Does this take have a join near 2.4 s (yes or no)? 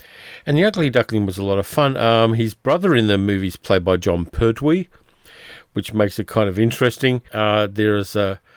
no